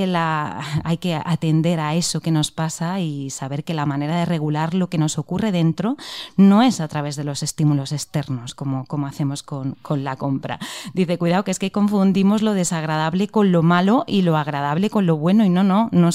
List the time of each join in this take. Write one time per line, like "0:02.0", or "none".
none